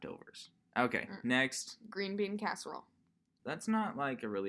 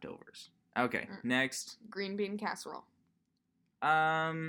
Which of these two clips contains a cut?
first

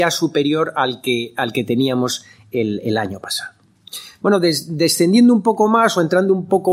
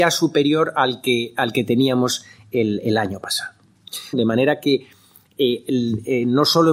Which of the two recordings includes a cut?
second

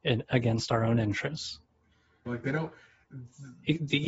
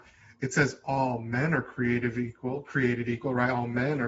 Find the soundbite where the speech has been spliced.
first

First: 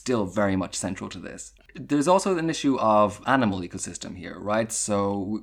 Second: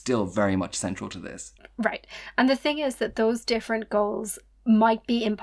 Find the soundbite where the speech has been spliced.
first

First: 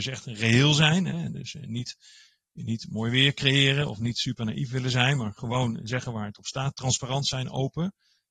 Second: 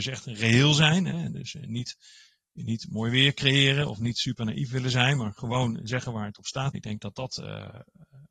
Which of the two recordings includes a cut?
second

